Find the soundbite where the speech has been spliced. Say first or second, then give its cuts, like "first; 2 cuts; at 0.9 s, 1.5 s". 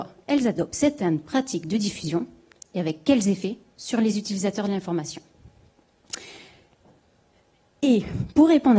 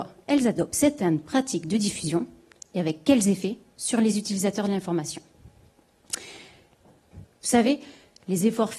second; 1 cut; at 7.1 s